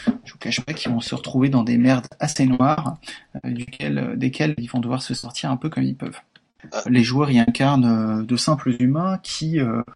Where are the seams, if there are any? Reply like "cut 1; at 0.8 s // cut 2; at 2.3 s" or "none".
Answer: cut 1; at 6.8 s